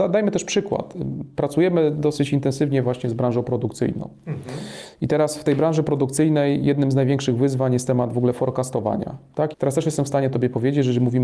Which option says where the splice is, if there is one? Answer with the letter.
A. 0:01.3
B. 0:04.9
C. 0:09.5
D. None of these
C